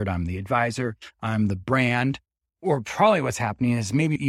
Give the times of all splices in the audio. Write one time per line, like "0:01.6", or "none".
none